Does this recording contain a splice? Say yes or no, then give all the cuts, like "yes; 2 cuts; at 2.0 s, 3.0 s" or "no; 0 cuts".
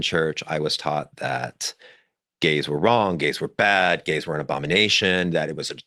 no; 0 cuts